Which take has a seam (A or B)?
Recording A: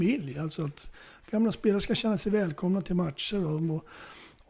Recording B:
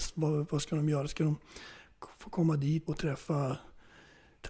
B